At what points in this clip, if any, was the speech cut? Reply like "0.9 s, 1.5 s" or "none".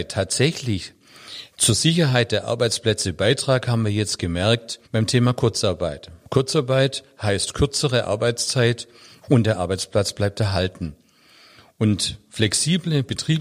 4.9 s